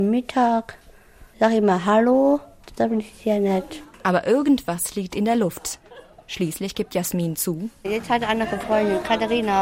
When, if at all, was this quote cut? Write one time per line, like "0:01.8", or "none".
0:07.8